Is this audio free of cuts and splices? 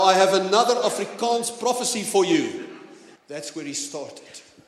no; 1 cut; at 3.2 s

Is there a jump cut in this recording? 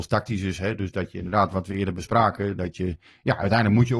no; 0 cuts

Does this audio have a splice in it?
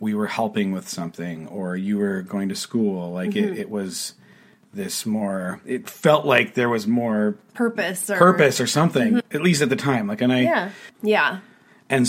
yes; 1 cut; at 10.9 s

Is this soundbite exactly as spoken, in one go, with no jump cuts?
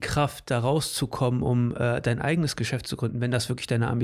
yes; 0 cuts

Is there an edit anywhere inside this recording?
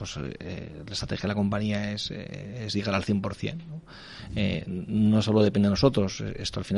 no; 0 cuts

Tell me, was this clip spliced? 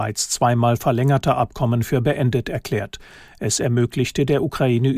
no; 0 cuts

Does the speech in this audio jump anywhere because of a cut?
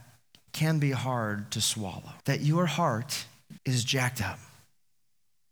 yes; 2 cuts; at 2.2 s, 3.6 s

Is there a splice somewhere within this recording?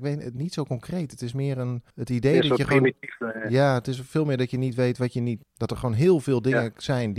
yes; 2 cuts; at 1.9 s, 5.4 s

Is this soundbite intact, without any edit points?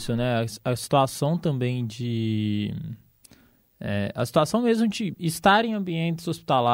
no; 1 cut; at 5.1 s

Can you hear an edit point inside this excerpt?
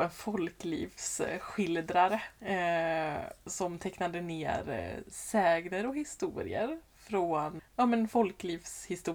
yes; 2 cuts; at 2.4 s, 7.6 s

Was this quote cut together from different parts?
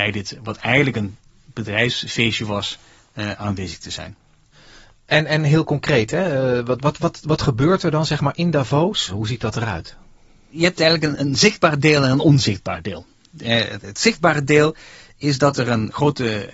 yes; 2 cuts; at 11.2 s, 13.8 s

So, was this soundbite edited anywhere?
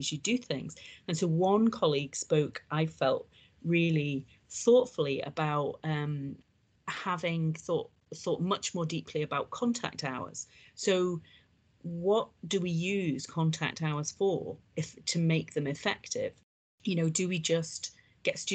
no; 0 cuts

